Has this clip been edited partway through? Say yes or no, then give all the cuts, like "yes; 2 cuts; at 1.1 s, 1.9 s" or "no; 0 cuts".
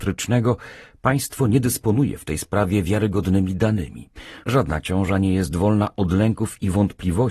yes; 1 cut; at 4.4 s